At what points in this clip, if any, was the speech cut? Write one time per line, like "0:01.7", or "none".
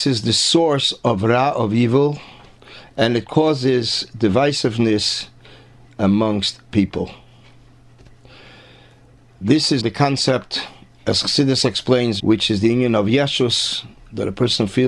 0:09.8
0:12.2